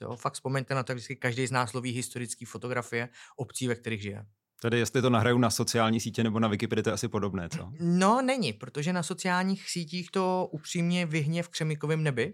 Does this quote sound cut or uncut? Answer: uncut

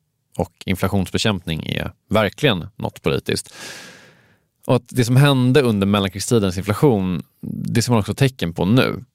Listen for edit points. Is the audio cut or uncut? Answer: uncut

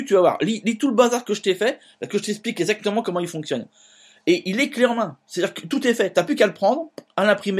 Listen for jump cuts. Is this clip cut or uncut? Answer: uncut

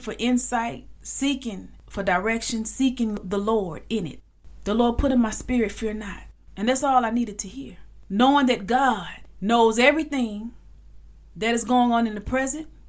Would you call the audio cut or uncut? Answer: uncut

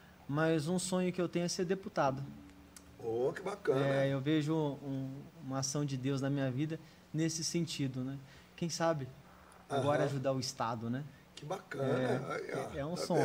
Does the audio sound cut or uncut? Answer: uncut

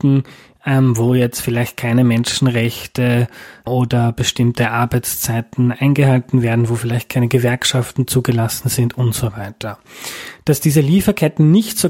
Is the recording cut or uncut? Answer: cut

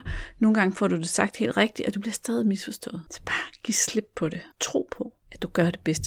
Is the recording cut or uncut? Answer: cut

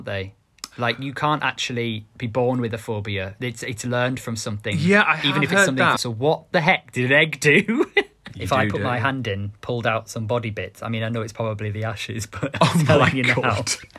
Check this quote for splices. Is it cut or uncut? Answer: cut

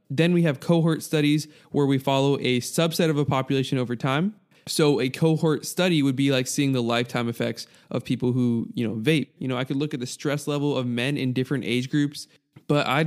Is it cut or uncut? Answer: cut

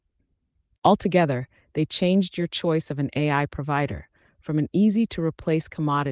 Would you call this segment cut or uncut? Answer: uncut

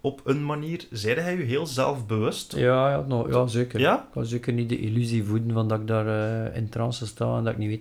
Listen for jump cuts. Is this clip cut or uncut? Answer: uncut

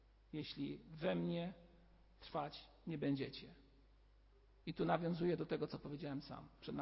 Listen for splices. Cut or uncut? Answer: uncut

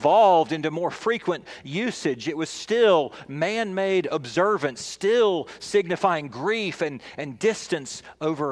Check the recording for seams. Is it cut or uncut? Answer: uncut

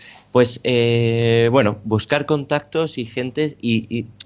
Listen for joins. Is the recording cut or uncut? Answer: uncut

